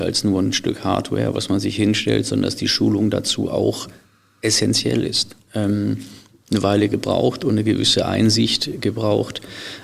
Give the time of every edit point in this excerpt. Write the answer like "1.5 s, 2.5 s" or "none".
5.4 s